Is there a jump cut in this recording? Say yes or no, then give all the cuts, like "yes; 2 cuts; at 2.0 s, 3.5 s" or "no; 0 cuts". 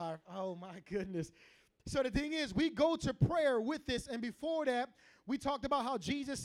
no; 0 cuts